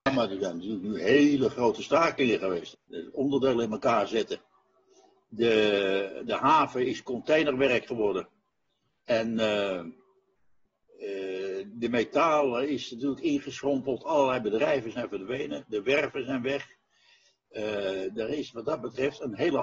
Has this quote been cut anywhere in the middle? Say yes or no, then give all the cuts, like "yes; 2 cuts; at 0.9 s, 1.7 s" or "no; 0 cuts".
yes; 1 cut; at 2.7 s